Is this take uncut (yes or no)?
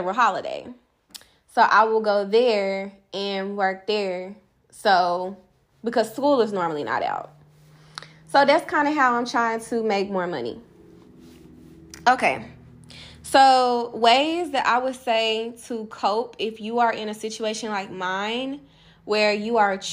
yes